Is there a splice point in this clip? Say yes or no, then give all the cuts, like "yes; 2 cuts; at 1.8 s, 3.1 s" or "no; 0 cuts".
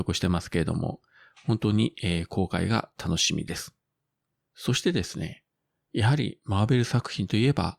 no; 0 cuts